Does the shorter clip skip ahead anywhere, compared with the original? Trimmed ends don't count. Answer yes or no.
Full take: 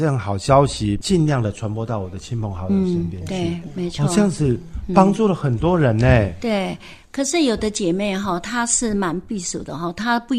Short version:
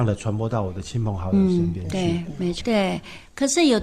yes